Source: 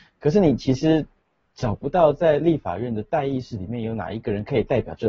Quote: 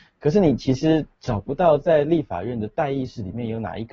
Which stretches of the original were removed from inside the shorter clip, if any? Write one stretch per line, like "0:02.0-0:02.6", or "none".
0:01.1-0:01.5